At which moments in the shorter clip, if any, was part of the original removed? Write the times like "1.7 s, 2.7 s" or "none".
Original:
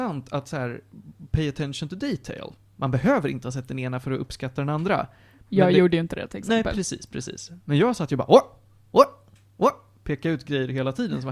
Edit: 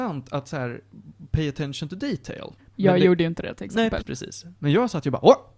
2.6 s, 4.0 s